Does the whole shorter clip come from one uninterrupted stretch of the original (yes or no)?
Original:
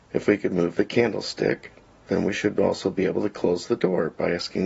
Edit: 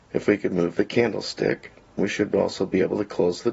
no